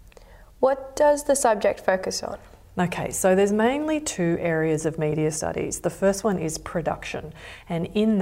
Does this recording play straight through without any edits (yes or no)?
yes